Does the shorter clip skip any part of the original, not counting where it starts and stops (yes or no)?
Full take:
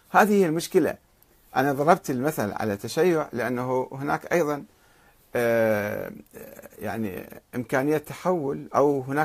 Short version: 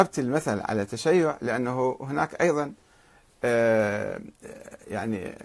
no